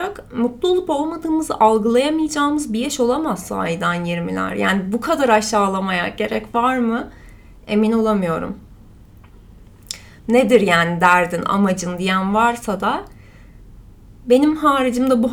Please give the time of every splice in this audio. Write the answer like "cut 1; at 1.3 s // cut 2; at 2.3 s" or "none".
cut 1; at 10.2 s